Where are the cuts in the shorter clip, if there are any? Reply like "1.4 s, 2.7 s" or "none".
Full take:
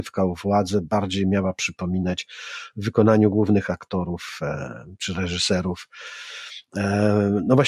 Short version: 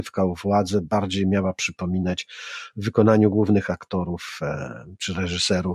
none